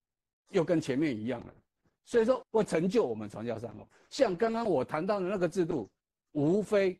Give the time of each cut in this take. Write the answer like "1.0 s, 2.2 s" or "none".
2.4 s